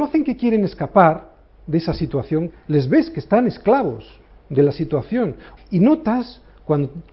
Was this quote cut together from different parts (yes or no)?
yes